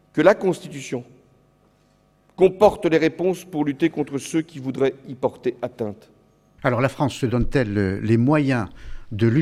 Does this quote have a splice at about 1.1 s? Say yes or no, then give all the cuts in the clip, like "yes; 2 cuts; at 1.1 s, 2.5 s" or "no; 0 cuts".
no; 1 cut; at 6.6 s